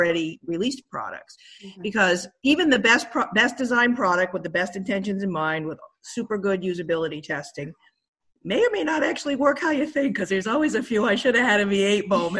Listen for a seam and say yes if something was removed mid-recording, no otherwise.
no